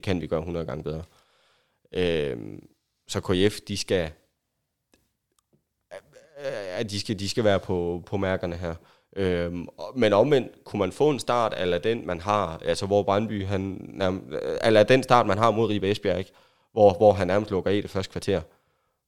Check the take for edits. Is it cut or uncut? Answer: uncut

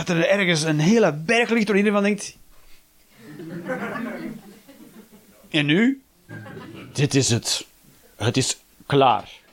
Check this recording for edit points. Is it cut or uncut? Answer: cut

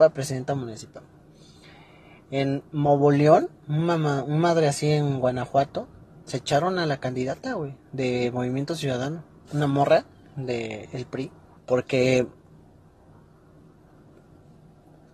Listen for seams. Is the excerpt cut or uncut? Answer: cut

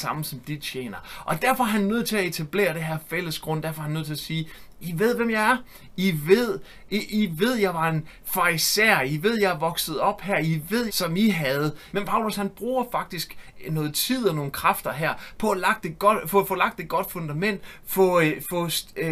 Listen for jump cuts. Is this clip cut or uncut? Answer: cut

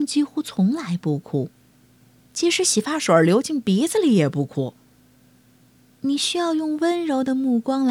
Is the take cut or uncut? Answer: cut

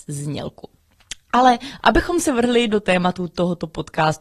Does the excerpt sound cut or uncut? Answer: uncut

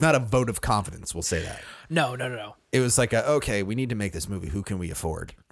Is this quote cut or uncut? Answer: uncut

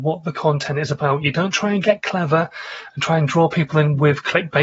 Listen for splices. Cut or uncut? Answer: uncut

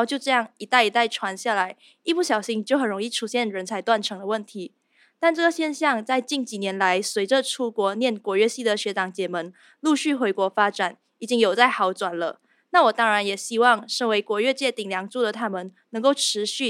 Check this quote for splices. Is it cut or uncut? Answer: uncut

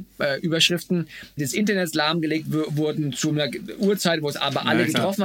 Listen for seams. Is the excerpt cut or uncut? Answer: cut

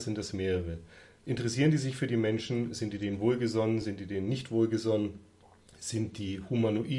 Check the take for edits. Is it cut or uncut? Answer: uncut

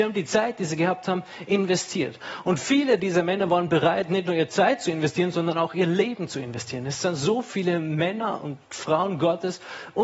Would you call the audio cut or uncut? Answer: uncut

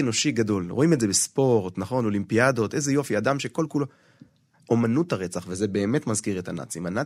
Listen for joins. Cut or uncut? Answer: cut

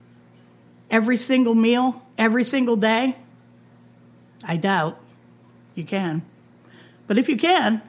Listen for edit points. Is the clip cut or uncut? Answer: cut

